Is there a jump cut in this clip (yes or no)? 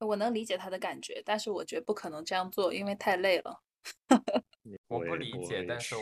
no